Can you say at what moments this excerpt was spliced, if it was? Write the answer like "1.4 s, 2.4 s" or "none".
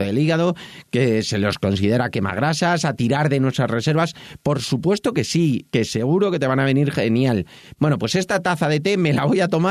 5.7 s, 7.8 s